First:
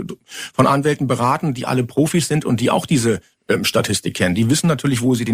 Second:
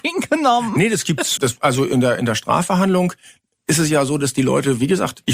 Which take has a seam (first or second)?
second